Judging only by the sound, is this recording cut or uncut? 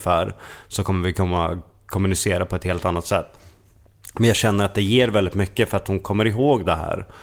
uncut